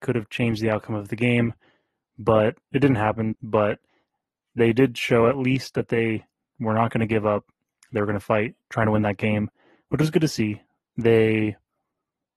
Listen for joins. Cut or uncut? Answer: cut